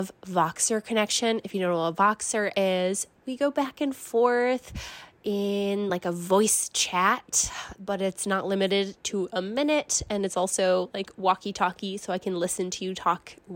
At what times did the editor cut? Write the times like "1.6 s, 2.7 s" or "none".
none